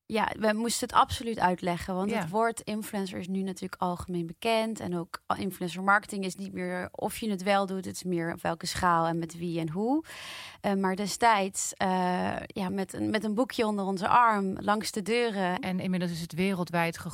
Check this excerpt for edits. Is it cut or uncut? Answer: cut